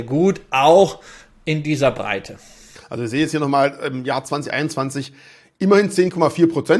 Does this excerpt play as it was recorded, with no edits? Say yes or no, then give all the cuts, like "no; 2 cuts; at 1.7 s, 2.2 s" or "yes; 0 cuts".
yes; 0 cuts